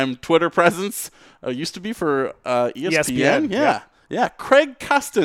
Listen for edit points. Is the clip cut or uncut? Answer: uncut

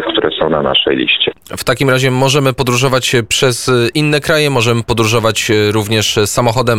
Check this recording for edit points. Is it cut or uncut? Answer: cut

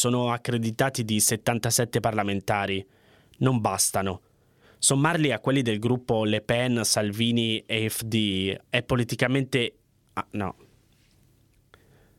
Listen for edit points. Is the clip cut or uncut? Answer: uncut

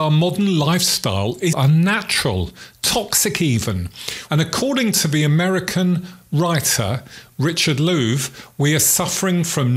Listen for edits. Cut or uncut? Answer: cut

